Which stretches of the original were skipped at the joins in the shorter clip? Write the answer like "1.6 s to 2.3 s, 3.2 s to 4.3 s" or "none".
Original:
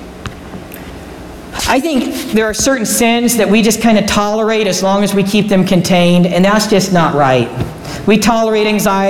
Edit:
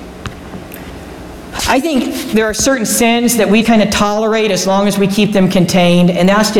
3.6 s to 3.8 s